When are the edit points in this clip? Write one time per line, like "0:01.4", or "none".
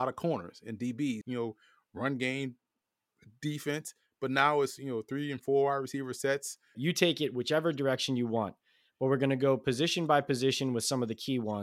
0:01.2
0:06.7